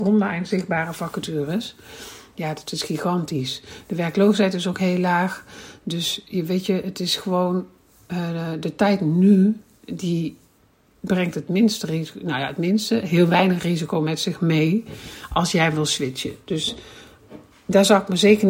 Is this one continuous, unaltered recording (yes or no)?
yes